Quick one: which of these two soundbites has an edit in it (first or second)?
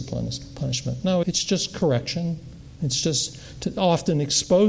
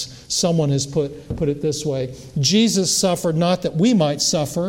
first